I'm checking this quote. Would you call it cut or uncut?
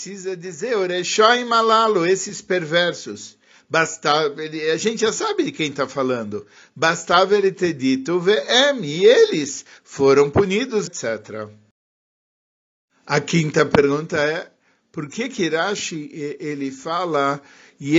cut